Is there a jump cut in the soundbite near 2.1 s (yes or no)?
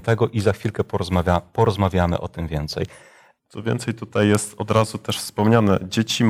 no